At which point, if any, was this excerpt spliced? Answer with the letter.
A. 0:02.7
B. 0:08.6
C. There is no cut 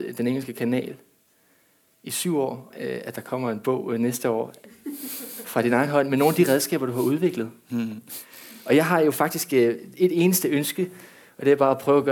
A